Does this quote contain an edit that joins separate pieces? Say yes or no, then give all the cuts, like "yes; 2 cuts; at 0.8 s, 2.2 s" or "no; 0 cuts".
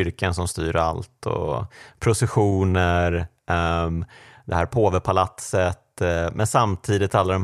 no; 0 cuts